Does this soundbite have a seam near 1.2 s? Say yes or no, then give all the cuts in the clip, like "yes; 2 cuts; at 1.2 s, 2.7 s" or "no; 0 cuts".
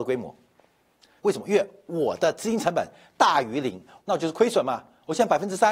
yes; 2 cuts; at 1.2 s, 4.0 s